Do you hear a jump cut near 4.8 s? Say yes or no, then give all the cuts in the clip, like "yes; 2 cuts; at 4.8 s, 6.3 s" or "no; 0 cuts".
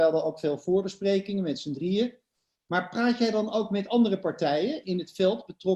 yes; 1 cut; at 4.8 s